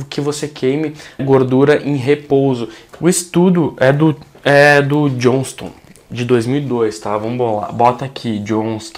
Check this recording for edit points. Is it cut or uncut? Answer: cut